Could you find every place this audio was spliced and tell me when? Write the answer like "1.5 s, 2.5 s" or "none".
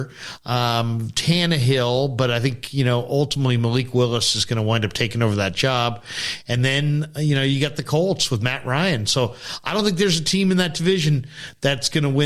none